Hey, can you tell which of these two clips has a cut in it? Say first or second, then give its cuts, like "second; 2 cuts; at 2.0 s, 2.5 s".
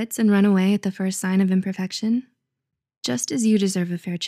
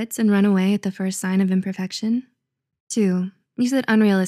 second; 1 cut; at 2.8 s